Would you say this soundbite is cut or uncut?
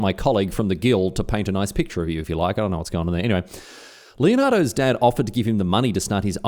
uncut